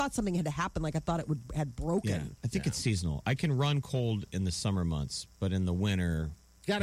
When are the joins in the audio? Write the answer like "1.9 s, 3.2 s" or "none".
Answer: none